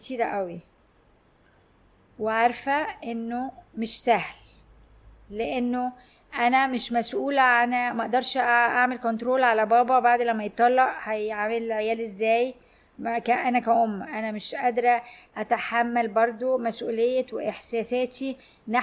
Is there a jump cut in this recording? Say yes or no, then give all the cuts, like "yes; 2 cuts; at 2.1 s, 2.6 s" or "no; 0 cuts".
no; 0 cuts